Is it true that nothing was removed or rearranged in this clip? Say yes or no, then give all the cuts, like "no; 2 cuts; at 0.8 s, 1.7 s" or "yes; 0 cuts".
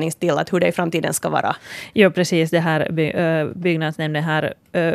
yes; 0 cuts